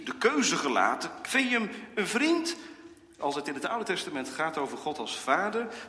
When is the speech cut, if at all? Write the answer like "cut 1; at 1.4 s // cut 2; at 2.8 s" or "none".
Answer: cut 1; at 1.2 s // cut 2; at 3.2 s